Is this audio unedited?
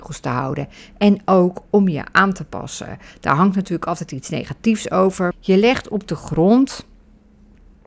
no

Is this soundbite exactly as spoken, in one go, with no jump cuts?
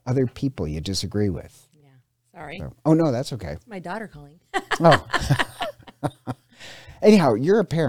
yes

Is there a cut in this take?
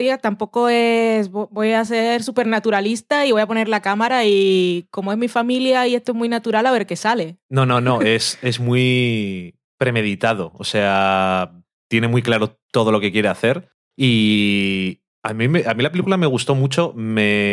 no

